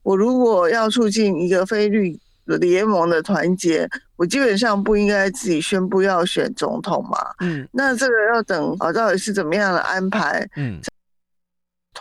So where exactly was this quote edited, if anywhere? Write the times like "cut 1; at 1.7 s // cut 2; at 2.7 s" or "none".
cut 1; at 8.8 s